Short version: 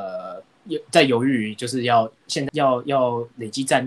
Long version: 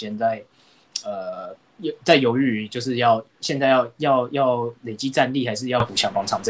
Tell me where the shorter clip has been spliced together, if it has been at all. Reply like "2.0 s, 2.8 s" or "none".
2.5 s